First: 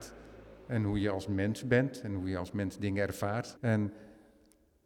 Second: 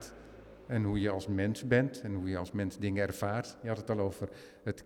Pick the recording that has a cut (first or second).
first